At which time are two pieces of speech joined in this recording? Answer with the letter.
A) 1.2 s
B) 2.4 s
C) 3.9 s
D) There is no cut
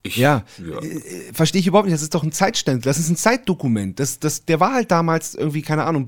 D